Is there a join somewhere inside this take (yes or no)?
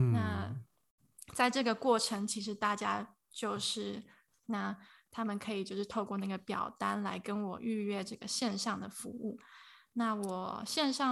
yes